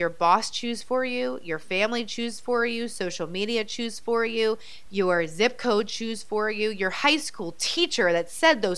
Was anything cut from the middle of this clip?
yes; 1 cut; at 4.9 s

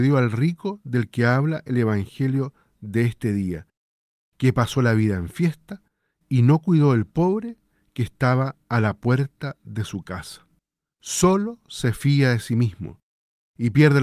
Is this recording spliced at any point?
yes; 1 cut; at 10.9 s

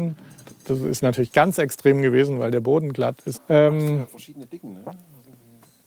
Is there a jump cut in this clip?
yes; 1 cut; at 3.3 s

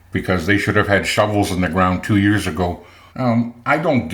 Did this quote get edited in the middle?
yes; 1 cut; at 3.1 s

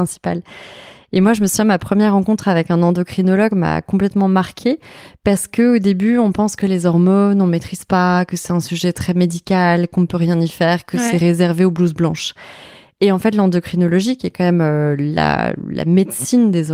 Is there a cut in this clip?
no; 0 cuts

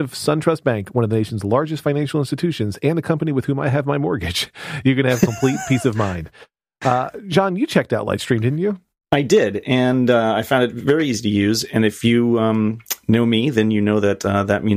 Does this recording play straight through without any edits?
yes; 0 cuts

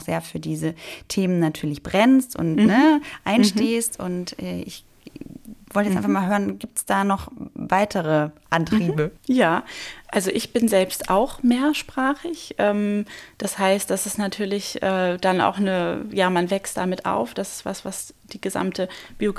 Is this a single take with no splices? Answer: no; 1 cut; at 9.2 s

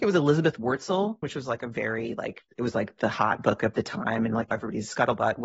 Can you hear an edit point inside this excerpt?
yes; 2 cuts; at 1.2 s, 2.5 s

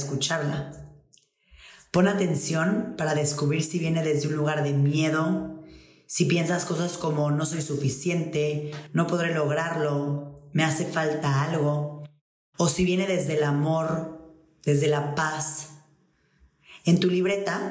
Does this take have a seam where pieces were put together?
no; 0 cuts

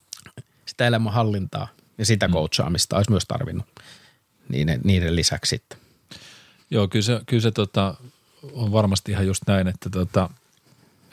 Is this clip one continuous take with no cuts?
yes; 0 cuts

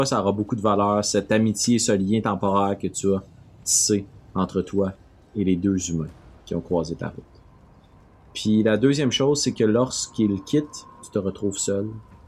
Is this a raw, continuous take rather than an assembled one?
no; 1 cut; at 11.0 s

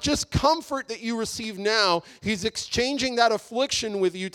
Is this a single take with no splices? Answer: yes; 0 cuts

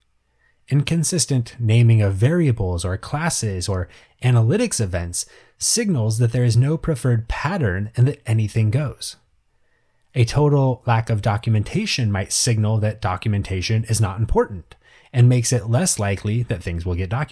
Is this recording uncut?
yes; 0 cuts

